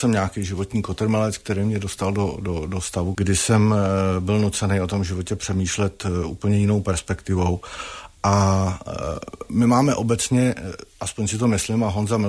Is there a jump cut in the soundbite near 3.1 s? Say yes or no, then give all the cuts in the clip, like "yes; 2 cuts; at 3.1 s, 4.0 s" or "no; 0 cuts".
yes; 1 cut; at 3.1 s